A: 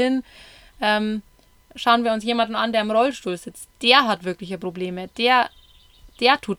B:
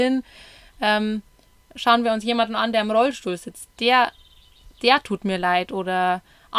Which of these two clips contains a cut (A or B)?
B